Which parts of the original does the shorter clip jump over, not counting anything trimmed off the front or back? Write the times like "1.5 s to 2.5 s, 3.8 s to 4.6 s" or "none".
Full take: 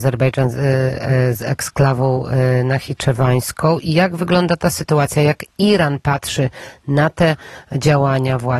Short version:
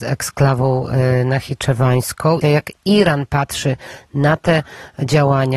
3.8 s to 5.1 s